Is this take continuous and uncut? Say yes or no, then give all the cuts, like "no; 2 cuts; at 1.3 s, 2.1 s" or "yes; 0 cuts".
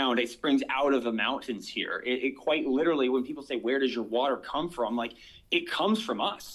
yes; 0 cuts